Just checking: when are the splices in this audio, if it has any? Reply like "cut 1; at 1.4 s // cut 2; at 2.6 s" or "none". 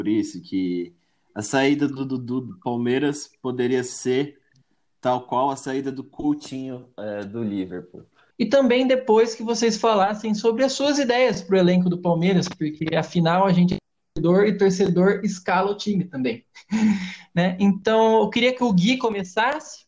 cut 1; at 8.3 s